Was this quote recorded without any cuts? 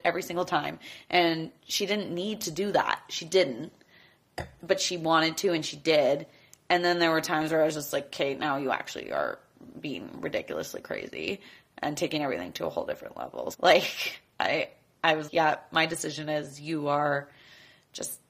no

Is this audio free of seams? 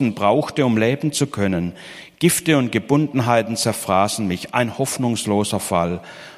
yes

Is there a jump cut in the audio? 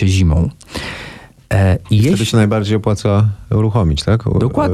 no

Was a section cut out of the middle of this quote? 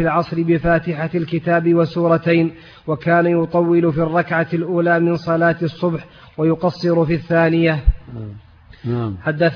no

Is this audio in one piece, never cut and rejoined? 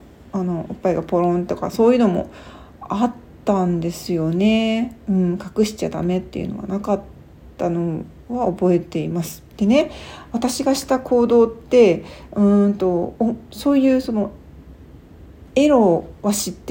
no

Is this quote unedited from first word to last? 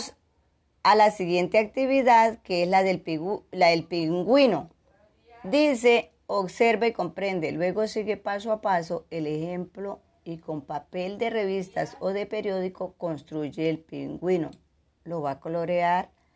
yes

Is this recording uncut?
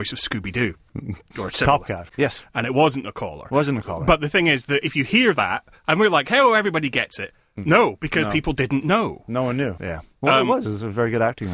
no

